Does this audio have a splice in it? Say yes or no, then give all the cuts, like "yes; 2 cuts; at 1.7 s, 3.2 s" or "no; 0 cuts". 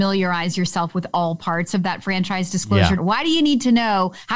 yes; 1 cut; at 3.0 s